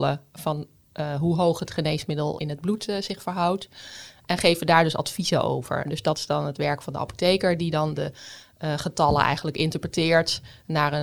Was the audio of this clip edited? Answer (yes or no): yes